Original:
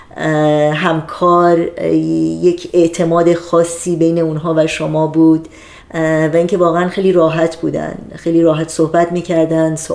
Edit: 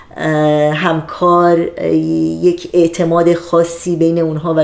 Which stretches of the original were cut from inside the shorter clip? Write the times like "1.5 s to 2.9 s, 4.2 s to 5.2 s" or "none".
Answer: none